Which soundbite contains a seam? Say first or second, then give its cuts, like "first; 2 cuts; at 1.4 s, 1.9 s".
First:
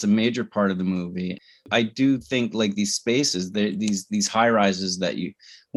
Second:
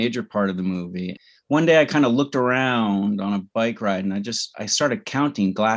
second; 1 cut; at 1.3 s